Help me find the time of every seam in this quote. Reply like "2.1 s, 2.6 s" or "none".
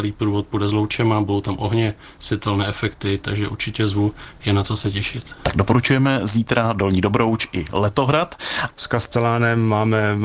8.7 s